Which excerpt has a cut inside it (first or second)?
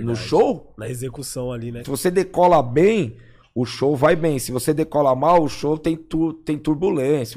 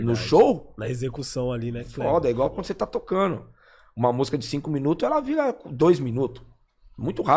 first